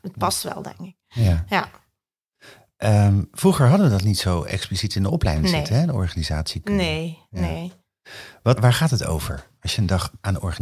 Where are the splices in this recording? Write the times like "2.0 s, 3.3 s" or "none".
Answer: 8.6 s